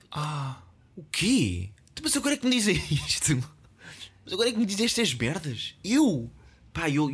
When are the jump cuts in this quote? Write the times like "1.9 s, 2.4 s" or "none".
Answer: none